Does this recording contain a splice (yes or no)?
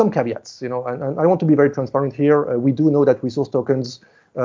no